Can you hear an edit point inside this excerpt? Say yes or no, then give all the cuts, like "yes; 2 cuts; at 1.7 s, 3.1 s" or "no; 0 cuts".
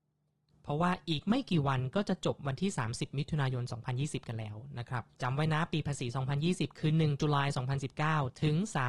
yes; 1 cut; at 5.1 s